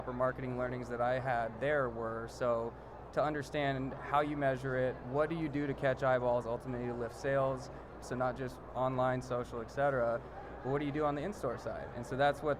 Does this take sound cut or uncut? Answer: cut